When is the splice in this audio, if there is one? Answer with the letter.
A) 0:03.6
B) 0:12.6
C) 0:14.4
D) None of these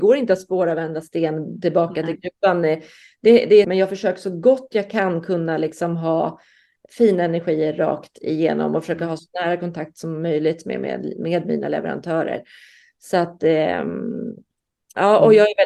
A